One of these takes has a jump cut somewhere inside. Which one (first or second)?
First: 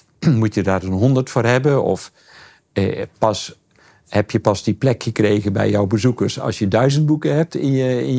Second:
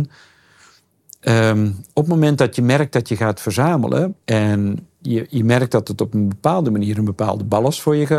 second